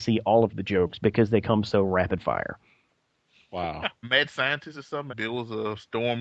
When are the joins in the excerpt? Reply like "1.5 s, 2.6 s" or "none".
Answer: 4.0 s, 5.1 s